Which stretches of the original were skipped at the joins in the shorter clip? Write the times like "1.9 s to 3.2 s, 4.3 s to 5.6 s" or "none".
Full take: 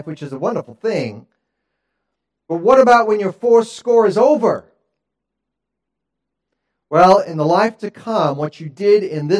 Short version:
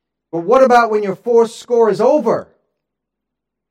none